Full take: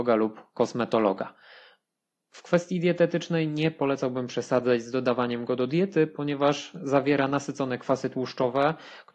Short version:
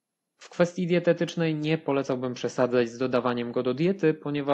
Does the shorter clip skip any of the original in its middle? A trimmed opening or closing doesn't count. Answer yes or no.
no